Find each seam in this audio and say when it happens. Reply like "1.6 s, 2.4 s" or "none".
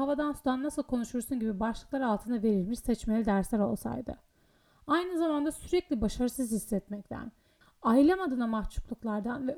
7.6 s